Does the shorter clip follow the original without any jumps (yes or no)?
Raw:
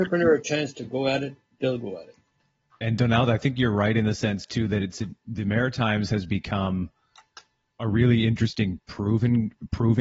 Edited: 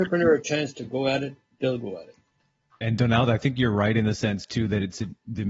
yes